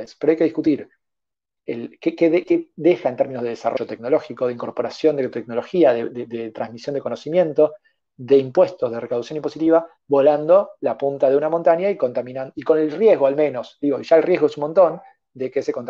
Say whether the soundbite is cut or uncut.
cut